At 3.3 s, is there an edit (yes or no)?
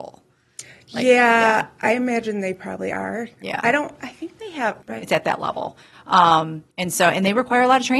no